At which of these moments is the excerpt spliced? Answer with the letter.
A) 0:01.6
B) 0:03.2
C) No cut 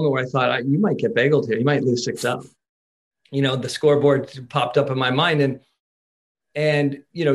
C